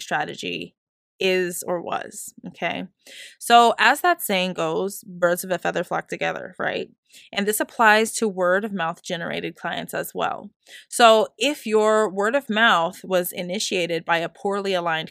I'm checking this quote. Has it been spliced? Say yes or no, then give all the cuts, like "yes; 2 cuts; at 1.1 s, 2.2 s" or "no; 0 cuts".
no; 0 cuts